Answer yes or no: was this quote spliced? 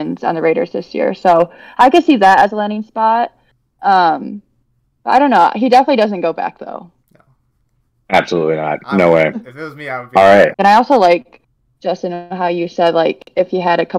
yes